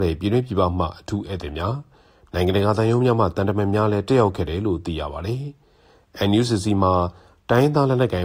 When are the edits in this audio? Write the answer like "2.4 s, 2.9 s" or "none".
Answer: none